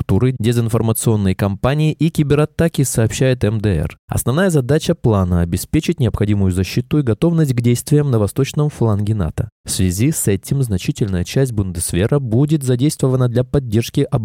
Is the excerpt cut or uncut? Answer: uncut